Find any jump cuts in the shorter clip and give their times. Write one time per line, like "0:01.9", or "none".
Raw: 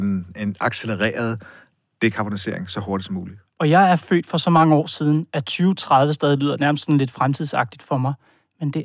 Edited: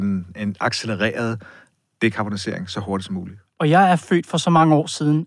none